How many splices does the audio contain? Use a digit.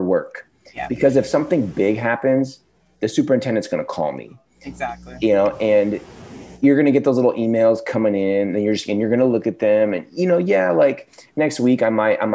0